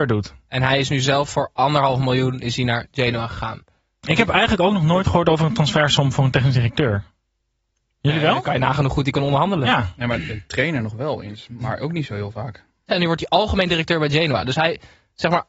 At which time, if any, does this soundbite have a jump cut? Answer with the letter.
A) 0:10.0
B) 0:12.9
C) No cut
B